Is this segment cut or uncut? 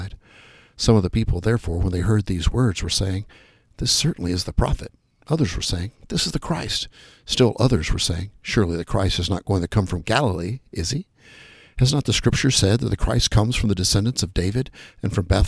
uncut